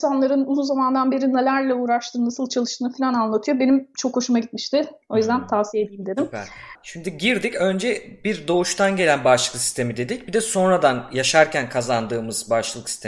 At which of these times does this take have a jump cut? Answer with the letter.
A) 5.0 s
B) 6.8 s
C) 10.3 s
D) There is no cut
B